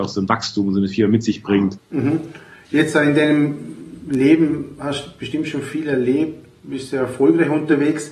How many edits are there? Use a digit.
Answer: 1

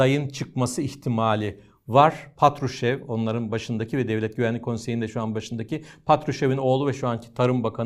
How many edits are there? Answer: 0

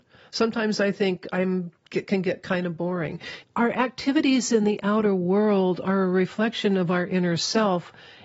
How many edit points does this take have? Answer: 1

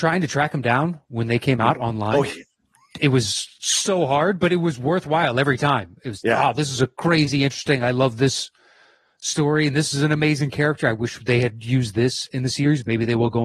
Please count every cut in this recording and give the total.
0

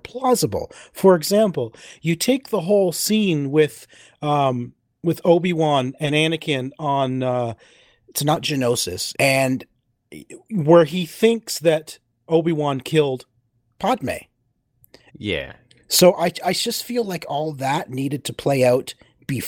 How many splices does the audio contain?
3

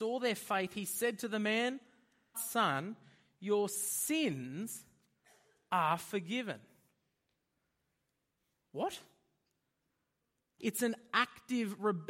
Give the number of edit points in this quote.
2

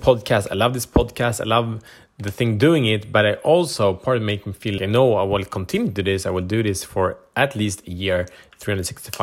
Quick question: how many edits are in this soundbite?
1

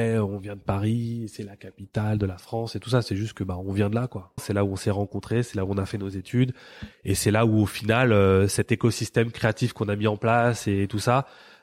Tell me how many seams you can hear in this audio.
1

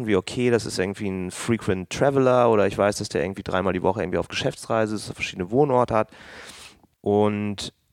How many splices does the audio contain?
1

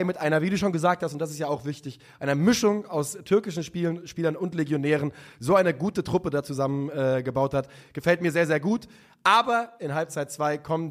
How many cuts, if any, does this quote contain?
0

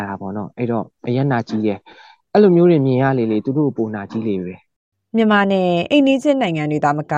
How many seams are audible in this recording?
0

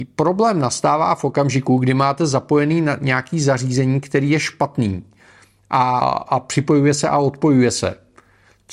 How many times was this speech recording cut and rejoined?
1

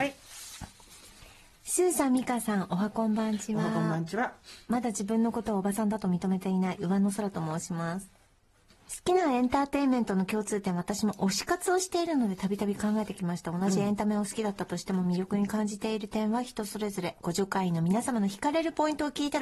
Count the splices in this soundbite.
0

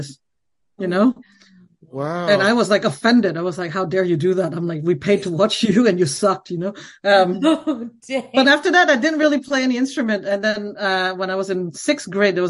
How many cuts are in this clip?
1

